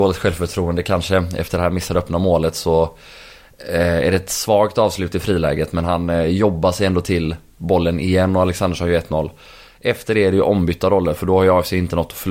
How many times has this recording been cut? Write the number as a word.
zero